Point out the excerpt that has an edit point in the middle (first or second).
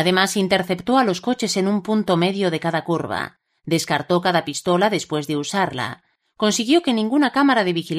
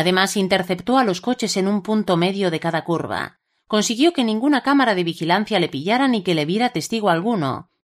second